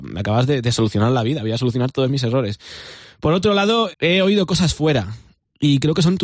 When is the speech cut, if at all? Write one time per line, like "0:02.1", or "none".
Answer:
0:03.9